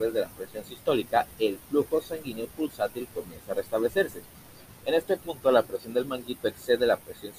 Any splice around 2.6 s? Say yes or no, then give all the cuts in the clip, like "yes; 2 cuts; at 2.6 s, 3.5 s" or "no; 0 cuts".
no; 1 cut; at 4.8 s